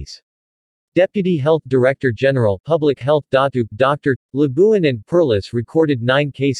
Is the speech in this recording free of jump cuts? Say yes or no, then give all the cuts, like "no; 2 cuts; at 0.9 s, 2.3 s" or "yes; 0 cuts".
no; 1 cut; at 4.2 s